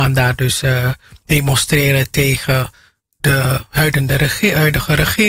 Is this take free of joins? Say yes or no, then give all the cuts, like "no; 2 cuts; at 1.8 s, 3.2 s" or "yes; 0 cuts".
yes; 0 cuts